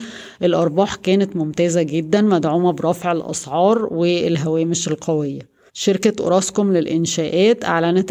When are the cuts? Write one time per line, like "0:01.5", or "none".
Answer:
0:05.7